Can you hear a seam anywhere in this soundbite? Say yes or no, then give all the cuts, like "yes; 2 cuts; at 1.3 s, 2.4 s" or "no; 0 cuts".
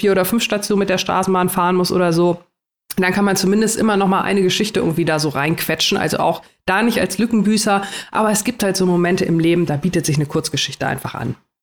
no; 0 cuts